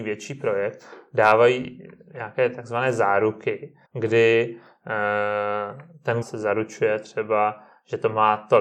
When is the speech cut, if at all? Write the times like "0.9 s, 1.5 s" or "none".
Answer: 3.8 s, 6.2 s